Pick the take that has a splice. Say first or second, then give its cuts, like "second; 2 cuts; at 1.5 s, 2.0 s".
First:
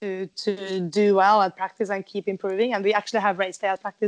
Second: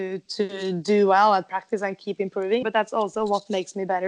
second; 1 cut; at 2.6 s